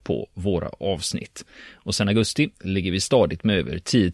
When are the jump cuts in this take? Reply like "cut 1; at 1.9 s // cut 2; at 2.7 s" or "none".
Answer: none